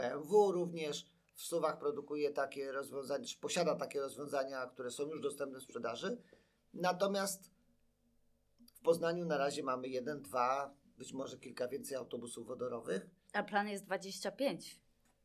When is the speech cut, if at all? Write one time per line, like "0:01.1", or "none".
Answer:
none